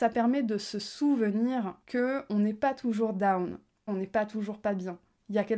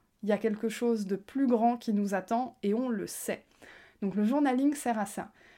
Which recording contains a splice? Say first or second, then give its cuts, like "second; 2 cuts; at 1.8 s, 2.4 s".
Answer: first; 2 cuts; at 1.8 s, 3.9 s